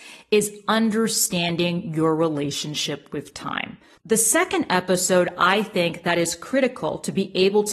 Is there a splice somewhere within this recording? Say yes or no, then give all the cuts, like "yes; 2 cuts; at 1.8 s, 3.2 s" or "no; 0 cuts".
yes; 1 cut; at 4.0 s